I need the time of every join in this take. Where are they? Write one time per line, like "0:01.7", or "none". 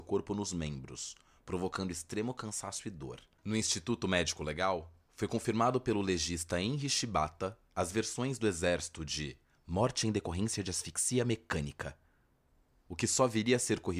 0:03.4